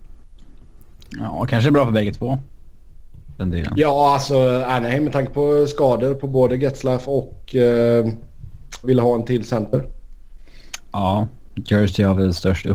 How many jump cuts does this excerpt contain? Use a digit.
1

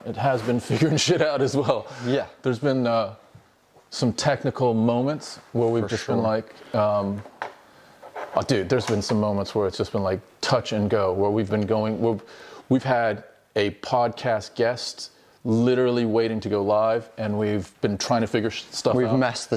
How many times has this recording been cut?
0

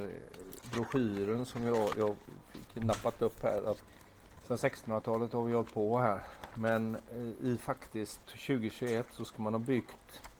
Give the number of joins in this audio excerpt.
1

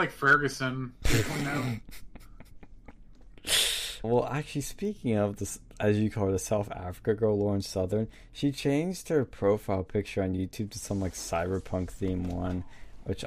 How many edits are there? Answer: 1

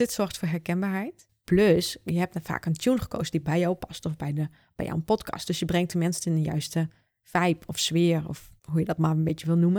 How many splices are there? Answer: 1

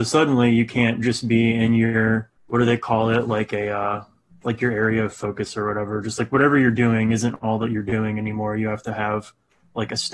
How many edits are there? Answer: 1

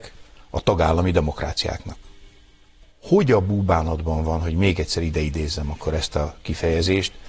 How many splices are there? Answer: 0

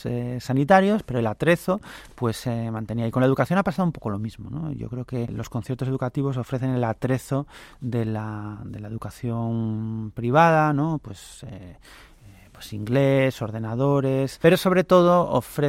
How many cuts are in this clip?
0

